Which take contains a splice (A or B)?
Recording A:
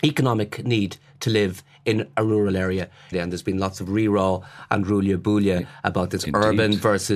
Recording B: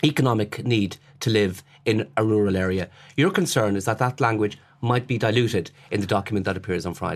A